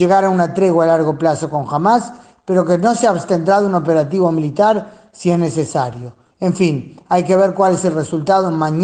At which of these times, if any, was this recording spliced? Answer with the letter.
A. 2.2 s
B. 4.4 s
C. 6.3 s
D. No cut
C